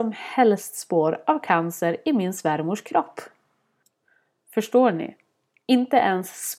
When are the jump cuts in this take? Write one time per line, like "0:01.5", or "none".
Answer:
none